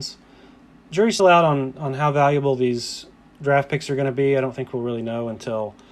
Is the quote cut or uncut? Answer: cut